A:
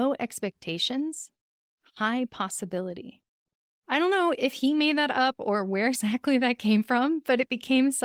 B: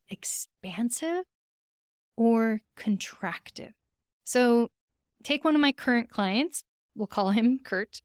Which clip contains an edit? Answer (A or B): B